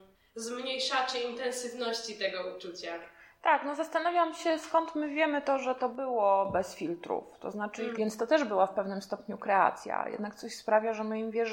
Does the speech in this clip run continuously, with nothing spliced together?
no; 1 cut; at 8.0 s

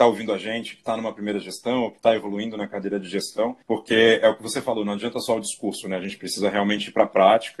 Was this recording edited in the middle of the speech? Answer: yes; 1 cut; at 3.6 s

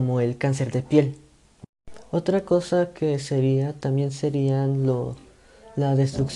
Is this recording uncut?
yes; 0 cuts

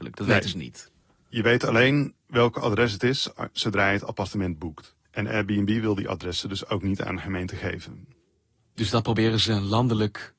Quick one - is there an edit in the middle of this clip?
no; 0 cuts

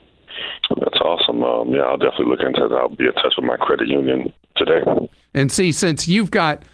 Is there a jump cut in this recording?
no; 0 cuts

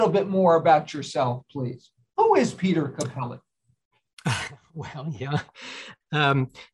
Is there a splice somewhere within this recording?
no; 0 cuts

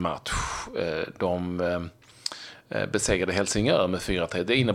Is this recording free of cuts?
yes; 0 cuts

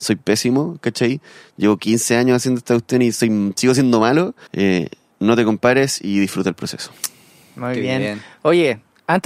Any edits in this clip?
yes; 1 cut; at 4.5 s

